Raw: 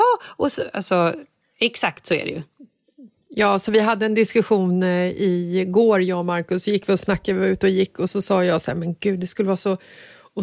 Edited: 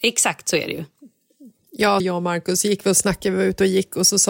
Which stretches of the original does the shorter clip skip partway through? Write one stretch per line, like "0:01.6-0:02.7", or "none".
0:03.6-0:06.0